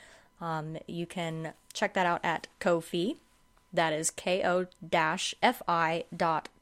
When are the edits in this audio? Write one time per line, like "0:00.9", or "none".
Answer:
0:02.5